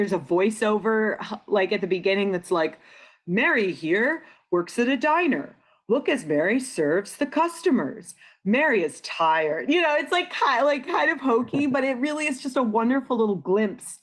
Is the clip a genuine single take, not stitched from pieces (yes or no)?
yes